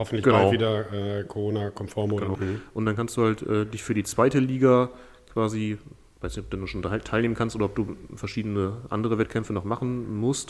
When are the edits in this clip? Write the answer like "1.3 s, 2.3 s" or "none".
2.3 s